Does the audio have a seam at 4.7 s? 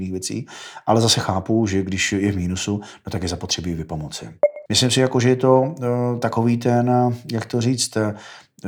yes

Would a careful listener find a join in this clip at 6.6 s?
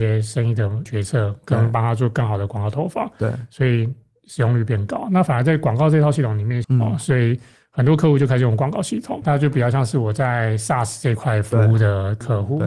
yes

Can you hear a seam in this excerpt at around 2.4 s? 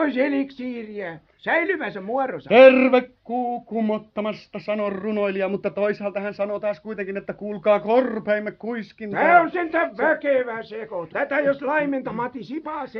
no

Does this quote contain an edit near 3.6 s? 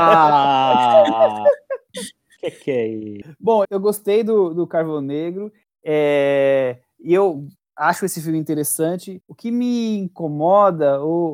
yes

